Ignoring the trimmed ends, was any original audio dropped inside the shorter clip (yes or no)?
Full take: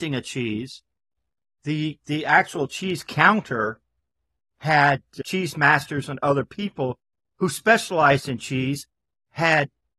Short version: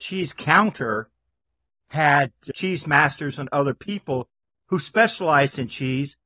no